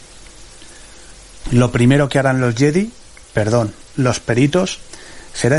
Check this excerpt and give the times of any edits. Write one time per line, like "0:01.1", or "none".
0:01.4